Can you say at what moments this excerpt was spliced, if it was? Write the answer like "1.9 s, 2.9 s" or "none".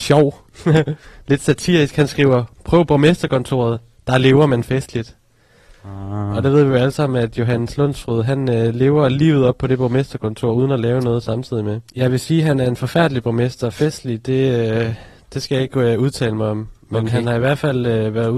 11.9 s